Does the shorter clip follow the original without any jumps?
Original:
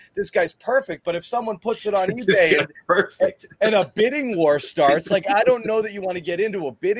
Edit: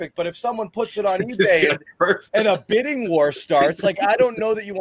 no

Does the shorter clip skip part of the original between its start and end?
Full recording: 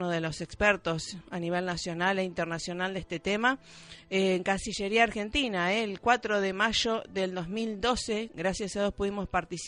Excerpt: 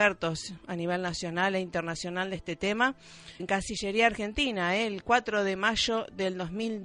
yes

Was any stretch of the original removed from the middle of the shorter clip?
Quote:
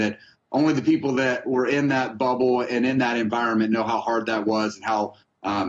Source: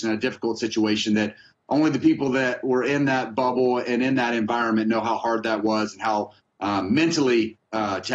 no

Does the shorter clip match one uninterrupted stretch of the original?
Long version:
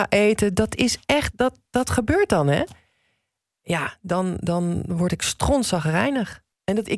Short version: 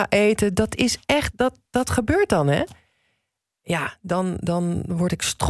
yes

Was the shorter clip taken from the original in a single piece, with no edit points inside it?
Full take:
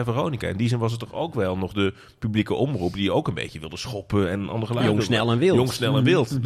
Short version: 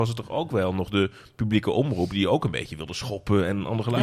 yes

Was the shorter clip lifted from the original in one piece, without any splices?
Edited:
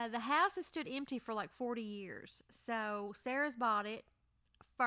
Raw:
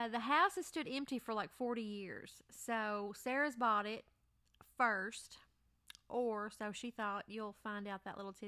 yes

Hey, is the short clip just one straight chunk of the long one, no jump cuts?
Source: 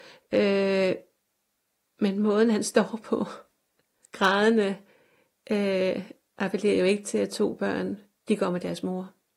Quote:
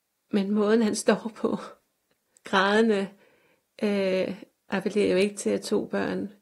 yes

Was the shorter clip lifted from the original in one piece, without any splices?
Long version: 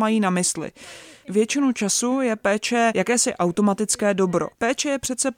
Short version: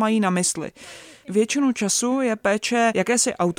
yes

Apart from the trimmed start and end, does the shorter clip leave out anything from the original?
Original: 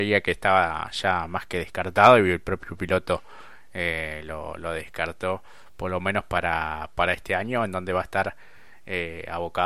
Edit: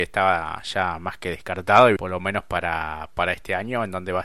yes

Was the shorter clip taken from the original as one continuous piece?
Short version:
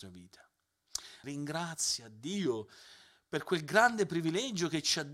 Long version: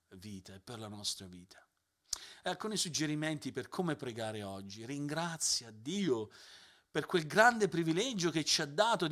no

